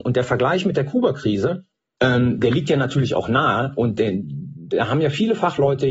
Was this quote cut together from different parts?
yes; 1 cut; at 2.0 s

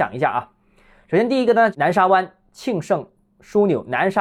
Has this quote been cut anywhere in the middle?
no; 0 cuts

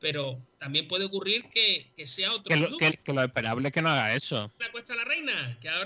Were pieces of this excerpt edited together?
yes; 2 cuts; at 2.9 s, 4.6 s

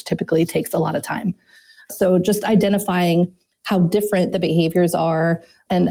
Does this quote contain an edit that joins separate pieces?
no; 0 cuts

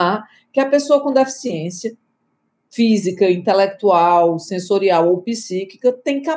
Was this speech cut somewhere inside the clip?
no; 0 cuts

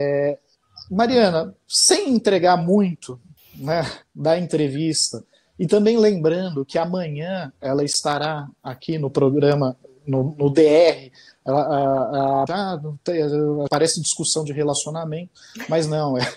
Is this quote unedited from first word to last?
no; 2 cuts; at 12.5 s, 13.7 s

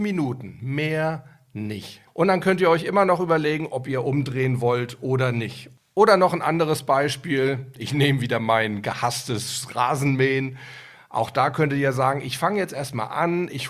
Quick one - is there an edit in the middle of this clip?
yes; 1 cut; at 2.1 s

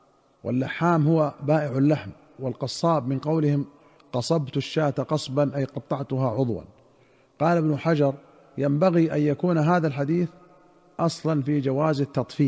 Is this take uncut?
no; 1 cut; at 6.3 s

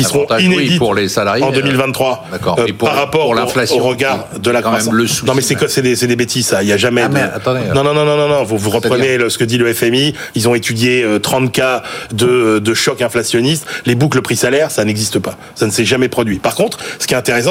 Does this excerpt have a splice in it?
no; 0 cuts

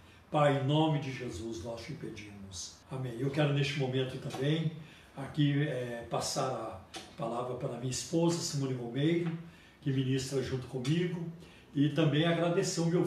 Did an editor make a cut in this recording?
yes; 1 cut; at 2.8 s

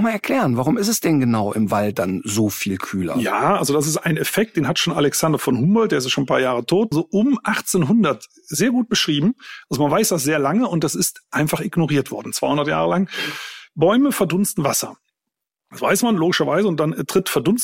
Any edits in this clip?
yes; 1 cut; at 6.9 s

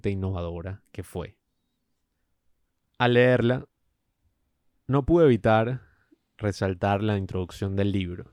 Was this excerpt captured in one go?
yes; 0 cuts

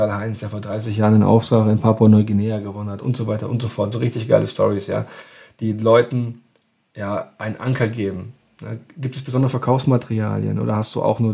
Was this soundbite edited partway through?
no; 0 cuts

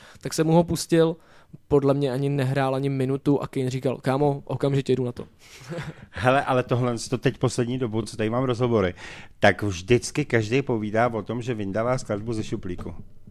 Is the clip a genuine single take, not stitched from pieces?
yes; 0 cuts

